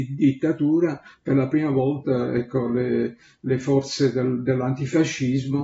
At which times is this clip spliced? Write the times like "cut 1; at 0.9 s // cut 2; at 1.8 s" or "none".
none